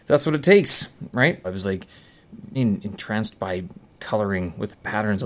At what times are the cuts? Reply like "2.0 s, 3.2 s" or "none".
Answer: 1.4 s, 2.5 s